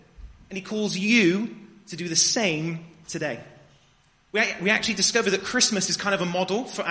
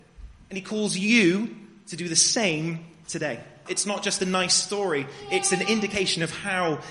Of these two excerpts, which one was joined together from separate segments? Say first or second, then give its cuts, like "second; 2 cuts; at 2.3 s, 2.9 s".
second; 1 cut; at 3.7 s